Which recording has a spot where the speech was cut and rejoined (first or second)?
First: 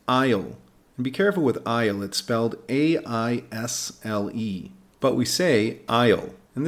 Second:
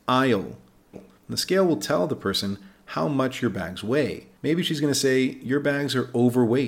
second